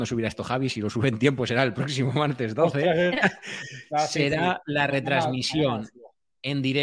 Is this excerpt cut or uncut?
cut